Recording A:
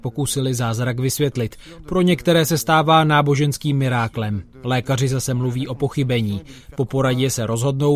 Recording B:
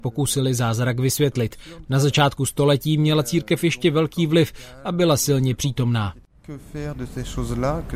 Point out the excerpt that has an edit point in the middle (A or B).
B